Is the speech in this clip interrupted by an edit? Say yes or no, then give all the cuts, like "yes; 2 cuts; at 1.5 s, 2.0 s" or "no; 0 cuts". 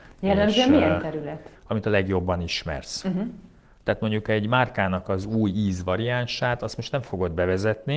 yes; 1 cut; at 1.5 s